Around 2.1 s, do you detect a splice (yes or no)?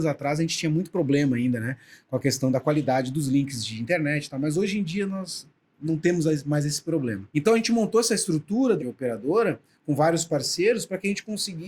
no